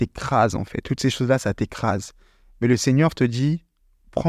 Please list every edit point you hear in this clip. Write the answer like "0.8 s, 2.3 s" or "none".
none